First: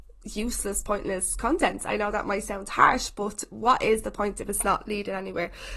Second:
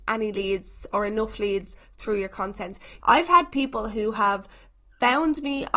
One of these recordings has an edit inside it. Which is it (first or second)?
second